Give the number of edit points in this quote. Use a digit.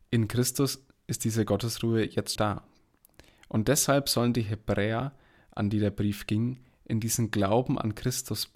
1